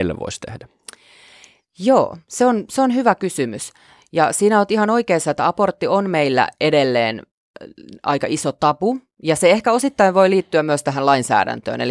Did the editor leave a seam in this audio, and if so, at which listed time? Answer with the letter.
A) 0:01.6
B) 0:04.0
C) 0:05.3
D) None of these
B